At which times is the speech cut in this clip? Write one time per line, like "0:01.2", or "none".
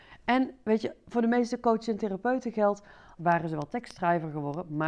0:01.0
0:03.2